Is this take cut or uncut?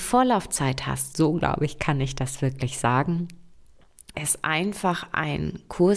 cut